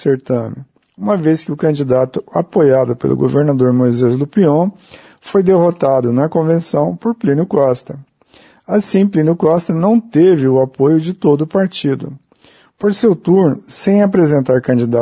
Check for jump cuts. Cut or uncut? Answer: uncut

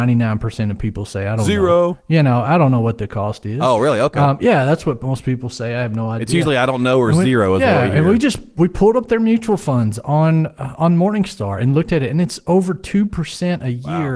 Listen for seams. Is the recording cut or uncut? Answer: uncut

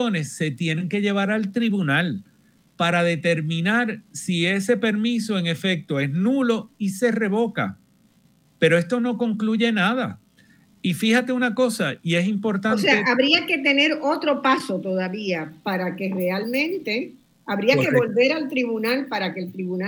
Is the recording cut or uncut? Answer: uncut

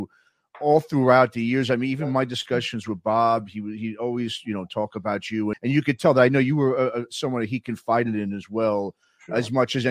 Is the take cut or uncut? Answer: cut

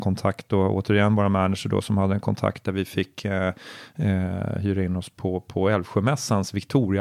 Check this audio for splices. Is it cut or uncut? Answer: uncut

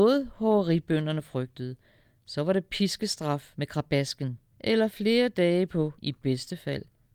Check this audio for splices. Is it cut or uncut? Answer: cut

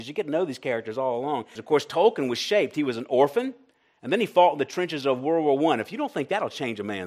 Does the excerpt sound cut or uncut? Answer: cut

